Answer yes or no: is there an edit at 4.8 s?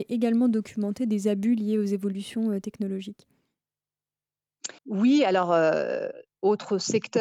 yes